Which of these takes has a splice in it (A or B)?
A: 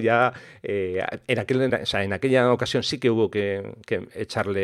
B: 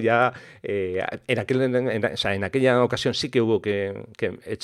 A